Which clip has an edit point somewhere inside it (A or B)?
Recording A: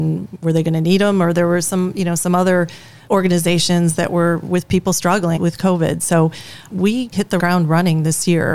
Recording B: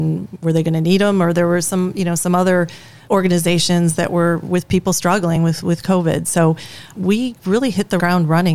A